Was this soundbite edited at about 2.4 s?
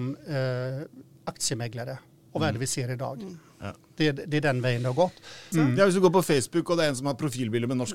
no; 1 cut; at 5.5 s

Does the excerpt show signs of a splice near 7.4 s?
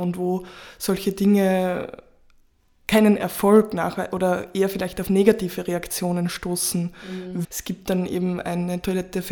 yes; 1 cut; at 7.4 s

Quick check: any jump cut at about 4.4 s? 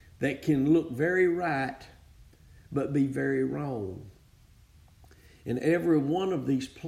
no; 0 cuts

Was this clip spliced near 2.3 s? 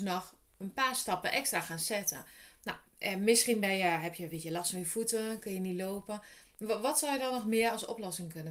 no; 0 cuts

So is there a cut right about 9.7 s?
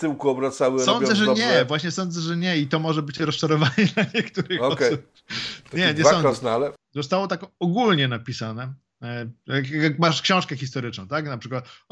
no; 1 cut; at 6.8 s

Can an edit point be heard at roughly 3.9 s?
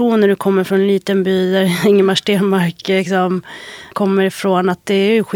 yes; 1 cut; at 3.9 s

